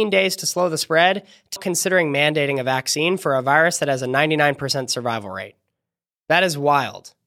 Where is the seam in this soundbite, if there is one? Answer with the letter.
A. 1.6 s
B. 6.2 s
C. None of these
A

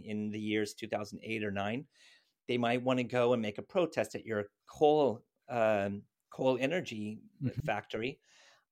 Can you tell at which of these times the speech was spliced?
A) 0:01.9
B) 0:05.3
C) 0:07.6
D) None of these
D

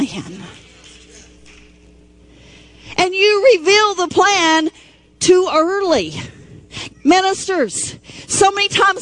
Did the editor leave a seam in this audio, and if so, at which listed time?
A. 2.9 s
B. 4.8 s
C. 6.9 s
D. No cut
C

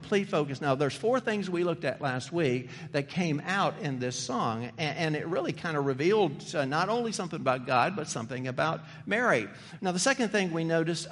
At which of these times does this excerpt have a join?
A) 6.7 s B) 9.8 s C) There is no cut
B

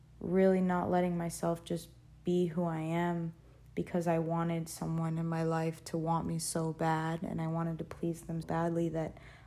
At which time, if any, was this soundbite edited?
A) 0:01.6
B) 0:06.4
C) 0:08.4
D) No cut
C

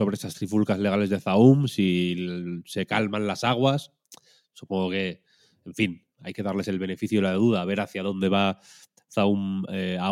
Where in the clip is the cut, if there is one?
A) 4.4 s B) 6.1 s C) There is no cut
B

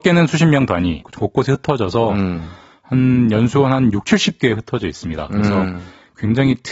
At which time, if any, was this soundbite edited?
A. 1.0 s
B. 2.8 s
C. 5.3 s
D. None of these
A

